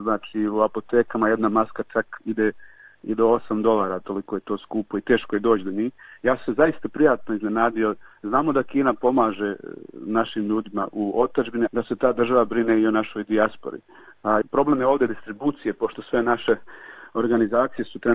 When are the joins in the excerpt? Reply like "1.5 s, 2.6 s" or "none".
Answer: 11.7 s, 14.4 s